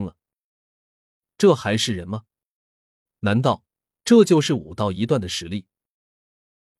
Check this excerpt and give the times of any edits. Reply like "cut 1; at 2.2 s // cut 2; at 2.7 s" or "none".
none